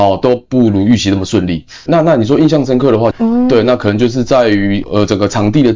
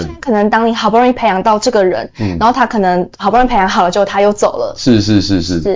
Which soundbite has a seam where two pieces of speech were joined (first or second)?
first